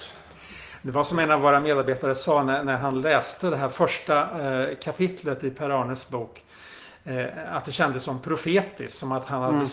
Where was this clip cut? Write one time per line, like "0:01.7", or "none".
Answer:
none